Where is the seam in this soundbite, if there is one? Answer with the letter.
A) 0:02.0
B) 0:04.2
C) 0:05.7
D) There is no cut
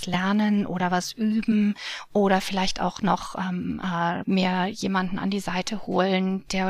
B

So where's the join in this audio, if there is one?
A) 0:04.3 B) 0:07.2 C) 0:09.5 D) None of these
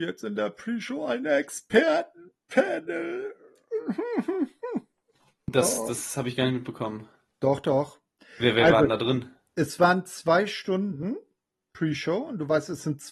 D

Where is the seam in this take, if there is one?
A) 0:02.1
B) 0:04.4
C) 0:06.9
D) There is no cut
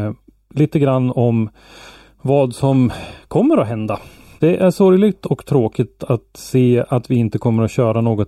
B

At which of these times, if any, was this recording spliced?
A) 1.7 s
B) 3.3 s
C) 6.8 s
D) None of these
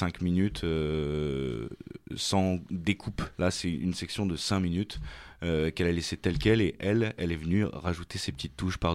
B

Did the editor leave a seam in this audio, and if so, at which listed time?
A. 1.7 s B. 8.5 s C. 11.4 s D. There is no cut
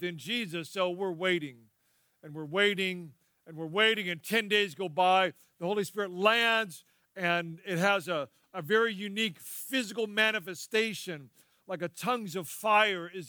D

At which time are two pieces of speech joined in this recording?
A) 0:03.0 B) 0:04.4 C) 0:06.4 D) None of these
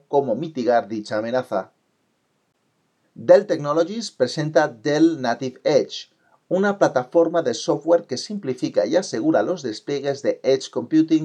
A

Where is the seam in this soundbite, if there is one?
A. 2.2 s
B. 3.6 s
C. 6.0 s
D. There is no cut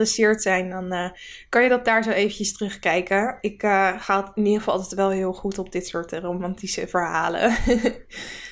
D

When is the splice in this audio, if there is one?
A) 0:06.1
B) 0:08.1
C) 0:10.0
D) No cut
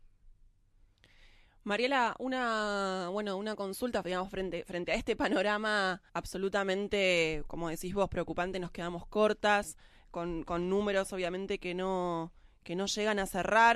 A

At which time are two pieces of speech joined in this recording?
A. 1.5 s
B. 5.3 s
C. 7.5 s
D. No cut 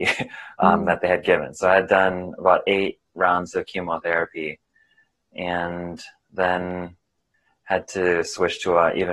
D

